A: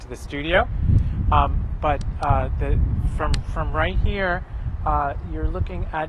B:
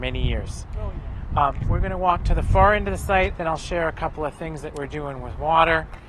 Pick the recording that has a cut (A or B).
B